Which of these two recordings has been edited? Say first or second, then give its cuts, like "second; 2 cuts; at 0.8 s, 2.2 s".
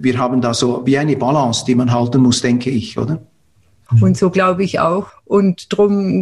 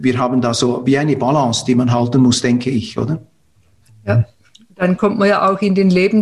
first; 2 cuts; at 3.9 s, 5.1 s